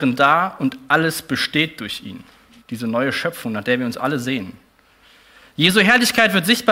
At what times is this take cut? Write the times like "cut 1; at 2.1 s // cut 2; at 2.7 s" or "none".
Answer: cut 1; at 2.6 s

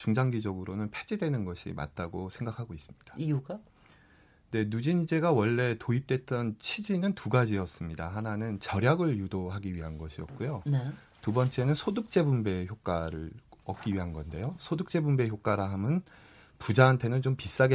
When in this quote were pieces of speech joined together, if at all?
none

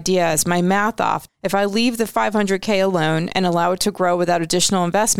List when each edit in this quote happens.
cut 1; at 1.3 s

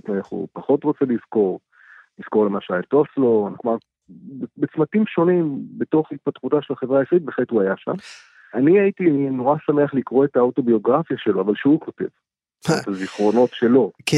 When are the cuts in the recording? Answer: cut 1; at 3.5 s

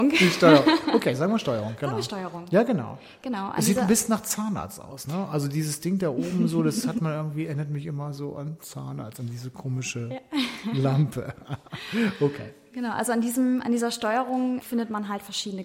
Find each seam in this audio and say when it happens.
none

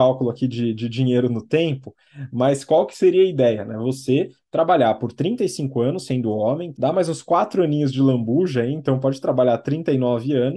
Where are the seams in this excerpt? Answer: cut 1; at 6.7 s

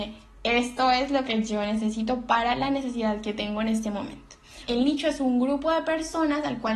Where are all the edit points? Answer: cut 1; at 4.7 s

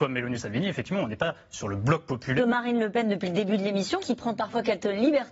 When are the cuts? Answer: cut 1; at 2.4 s // cut 2; at 4.0 s

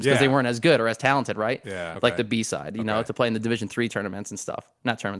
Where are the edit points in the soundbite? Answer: cut 1; at 1.9 s

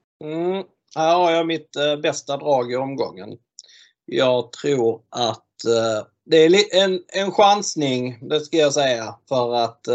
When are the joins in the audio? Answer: none

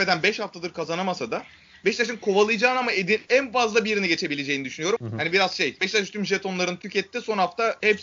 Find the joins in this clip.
cut 1; at 5.0 s

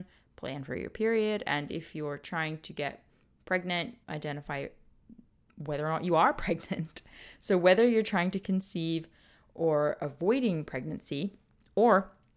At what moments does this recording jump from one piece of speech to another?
cut 1; at 4.0 s

